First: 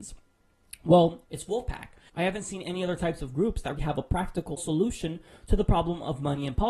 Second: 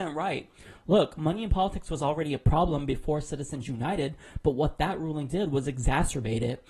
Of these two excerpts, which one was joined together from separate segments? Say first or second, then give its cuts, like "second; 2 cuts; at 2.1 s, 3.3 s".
first; 2 cuts; at 1.2 s, 3.8 s